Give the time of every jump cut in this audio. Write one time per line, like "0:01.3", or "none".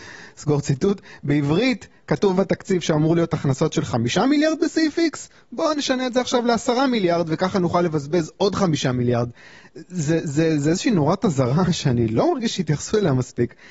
none